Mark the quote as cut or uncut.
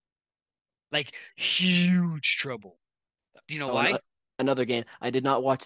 uncut